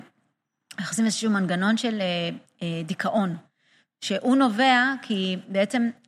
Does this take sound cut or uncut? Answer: uncut